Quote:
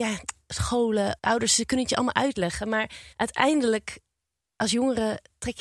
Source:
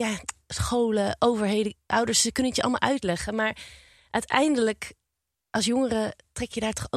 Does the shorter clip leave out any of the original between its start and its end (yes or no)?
yes